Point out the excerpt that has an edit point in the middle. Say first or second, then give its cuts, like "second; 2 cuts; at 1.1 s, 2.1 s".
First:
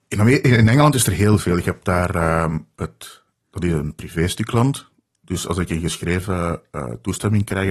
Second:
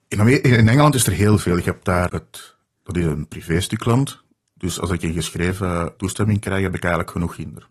second; 2 cuts; at 2.1 s, 6.0 s